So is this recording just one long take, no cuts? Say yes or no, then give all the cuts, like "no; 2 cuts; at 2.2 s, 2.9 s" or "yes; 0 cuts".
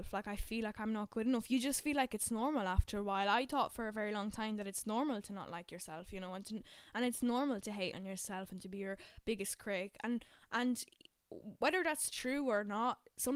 yes; 0 cuts